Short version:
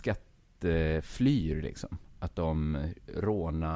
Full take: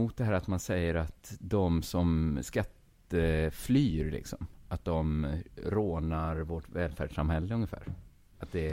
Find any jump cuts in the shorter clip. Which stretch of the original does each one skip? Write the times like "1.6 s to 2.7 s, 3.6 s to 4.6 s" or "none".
none